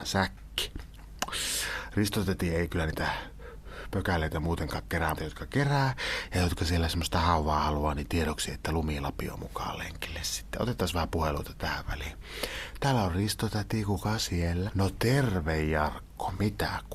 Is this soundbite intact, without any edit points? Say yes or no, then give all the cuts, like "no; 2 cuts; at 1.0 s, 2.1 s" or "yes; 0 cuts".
no; 2 cuts; at 5.2 s, 14.7 s